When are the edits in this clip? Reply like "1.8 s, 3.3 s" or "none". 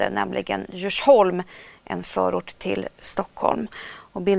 none